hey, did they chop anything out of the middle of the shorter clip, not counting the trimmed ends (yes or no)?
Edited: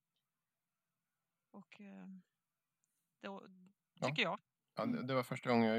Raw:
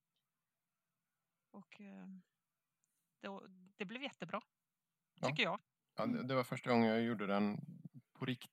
yes